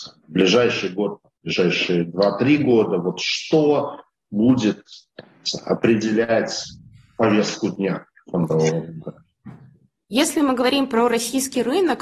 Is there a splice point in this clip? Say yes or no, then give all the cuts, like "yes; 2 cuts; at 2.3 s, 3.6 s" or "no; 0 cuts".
no; 0 cuts